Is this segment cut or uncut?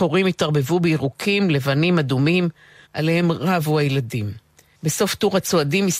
cut